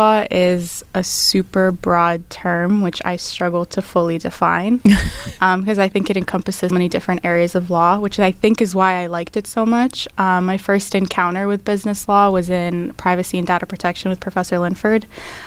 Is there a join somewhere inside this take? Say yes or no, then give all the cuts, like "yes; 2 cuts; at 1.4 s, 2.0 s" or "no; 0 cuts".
yes; 1 cut; at 6.7 s